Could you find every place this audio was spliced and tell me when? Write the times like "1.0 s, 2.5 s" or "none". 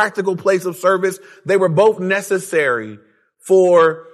1.4 s

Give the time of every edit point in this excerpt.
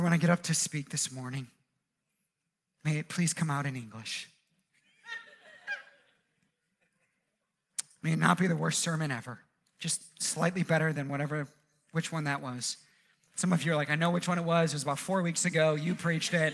none

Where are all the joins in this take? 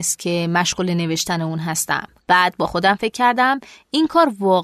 2.2 s

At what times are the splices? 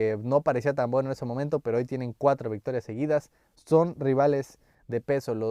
none

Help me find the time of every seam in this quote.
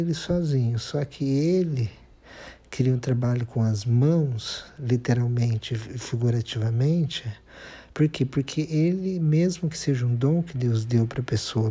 none

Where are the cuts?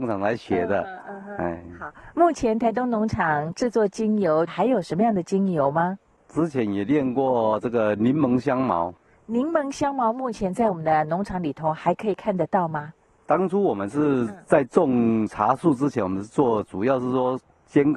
4.5 s

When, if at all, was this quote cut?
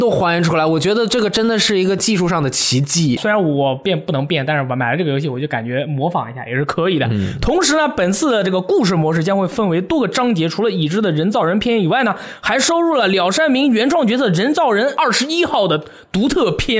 3.2 s

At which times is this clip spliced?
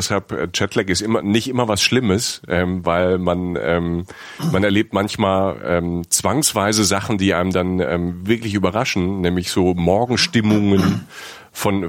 none

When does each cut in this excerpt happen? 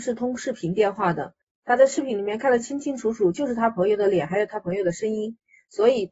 none

